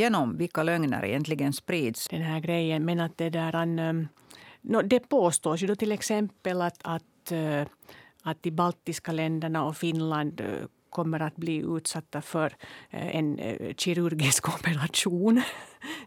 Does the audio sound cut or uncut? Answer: cut